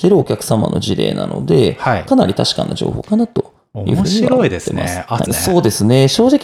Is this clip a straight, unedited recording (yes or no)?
no